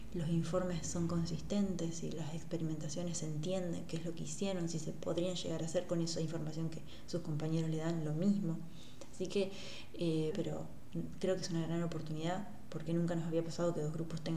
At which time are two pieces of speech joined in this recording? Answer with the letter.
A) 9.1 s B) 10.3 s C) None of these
B